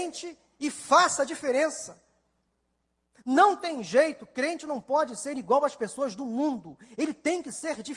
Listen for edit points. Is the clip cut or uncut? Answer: uncut